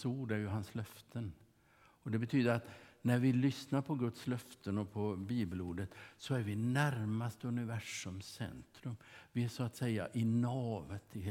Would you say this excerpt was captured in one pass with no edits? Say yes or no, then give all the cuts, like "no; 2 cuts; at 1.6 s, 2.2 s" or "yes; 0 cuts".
yes; 0 cuts